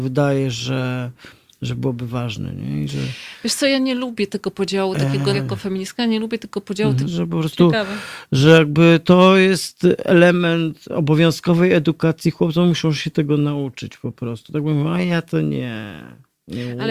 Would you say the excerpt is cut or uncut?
cut